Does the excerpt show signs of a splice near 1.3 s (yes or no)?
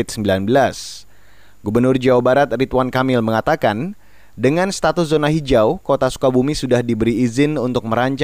no